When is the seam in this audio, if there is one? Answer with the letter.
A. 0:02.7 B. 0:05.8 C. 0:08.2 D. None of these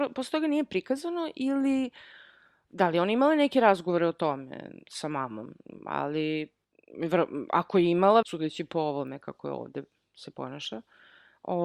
C